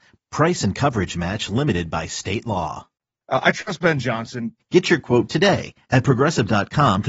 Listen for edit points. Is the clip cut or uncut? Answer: cut